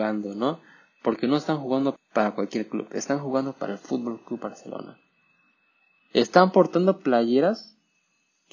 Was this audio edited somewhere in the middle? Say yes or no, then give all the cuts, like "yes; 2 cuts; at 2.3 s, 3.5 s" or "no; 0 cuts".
yes; 1 cut; at 2.0 s